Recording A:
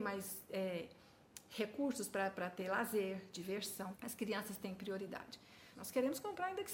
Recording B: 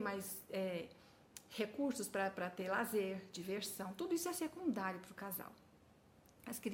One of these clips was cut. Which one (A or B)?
A